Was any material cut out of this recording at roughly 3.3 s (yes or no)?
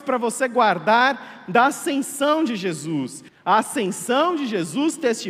yes